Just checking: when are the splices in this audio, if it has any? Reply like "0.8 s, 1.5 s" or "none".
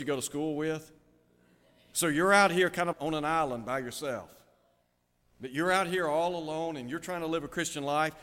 2.9 s, 5.2 s